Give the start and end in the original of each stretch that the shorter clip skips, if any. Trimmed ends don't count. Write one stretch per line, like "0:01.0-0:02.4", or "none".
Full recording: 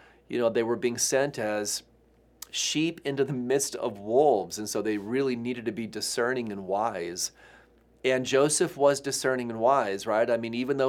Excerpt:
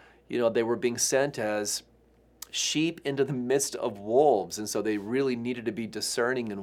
none